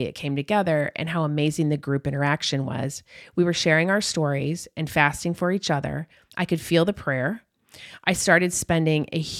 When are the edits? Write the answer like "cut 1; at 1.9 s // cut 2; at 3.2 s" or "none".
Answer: cut 1; at 6.3 s